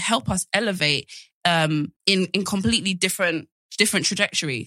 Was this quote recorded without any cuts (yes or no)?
no